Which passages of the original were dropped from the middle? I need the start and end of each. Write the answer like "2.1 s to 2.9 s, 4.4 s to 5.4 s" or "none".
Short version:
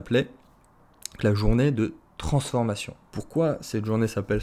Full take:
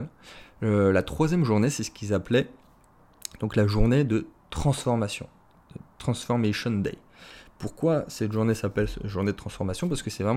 3.4 s to 3.5 s, 5.4 s to 7.6 s